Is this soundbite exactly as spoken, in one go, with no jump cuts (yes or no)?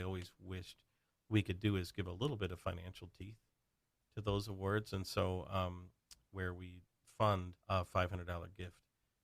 no